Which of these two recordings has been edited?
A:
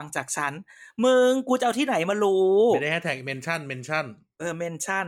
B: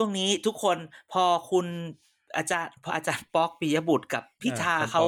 B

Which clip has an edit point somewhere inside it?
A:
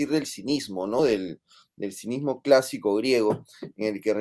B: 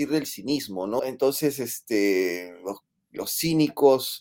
B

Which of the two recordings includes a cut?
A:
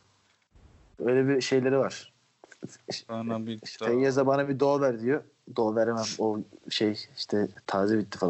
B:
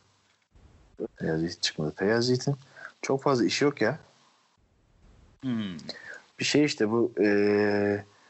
B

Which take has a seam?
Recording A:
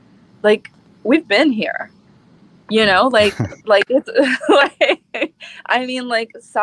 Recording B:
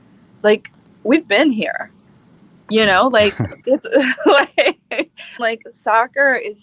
B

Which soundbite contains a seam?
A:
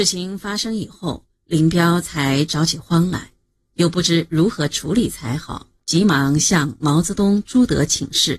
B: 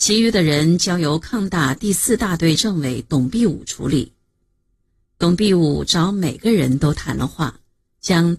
A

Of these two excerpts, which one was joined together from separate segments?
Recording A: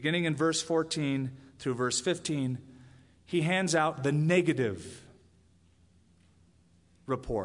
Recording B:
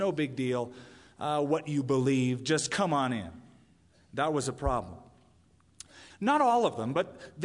B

